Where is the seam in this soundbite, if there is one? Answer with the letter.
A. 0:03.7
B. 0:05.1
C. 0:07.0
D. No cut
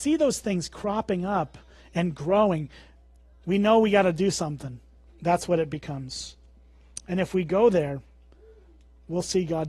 B